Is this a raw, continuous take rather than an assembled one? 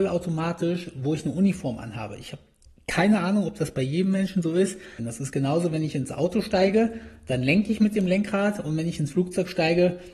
no; 1 cut; at 5.0 s

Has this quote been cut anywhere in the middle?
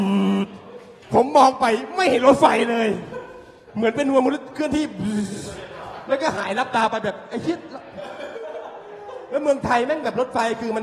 yes; 1 cut; at 1.0 s

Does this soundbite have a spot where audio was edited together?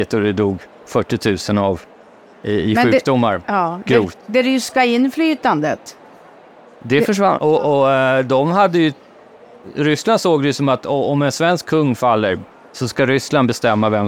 yes; 1 cut; at 7.4 s

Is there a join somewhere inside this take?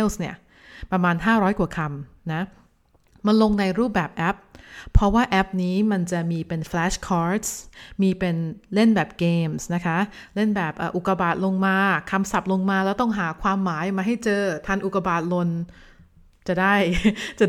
no; 0 cuts

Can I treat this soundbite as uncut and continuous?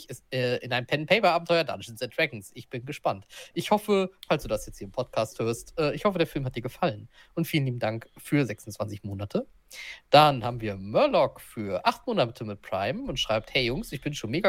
yes; 0 cuts

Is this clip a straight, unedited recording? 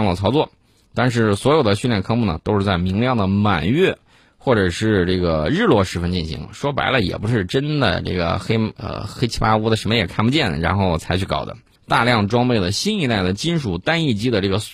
no; 1 cut; at 11.8 s

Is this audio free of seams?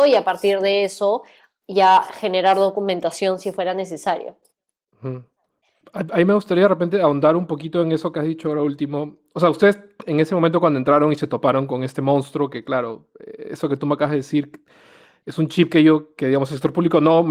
yes; 0 cuts

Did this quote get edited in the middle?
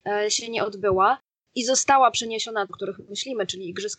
yes; 1 cut; at 2.7 s

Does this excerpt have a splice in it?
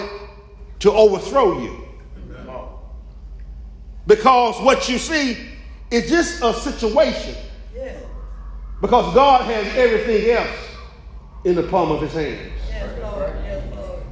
no; 0 cuts

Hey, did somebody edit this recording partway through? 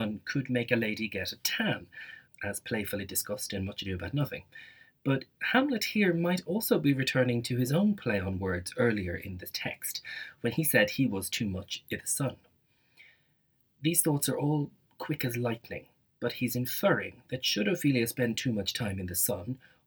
yes; 1 cut; at 2.2 s

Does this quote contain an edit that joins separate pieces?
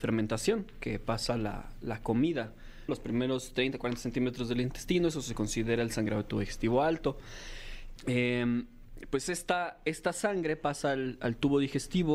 yes; 2 cuts; at 2.9 s, 8.0 s

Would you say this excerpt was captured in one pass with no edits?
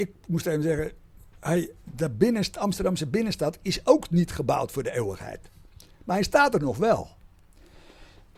yes; 0 cuts

